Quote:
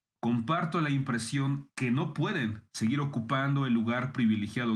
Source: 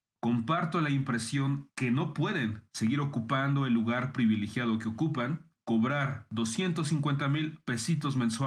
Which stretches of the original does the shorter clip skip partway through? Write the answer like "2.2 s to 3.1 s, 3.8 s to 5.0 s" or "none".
none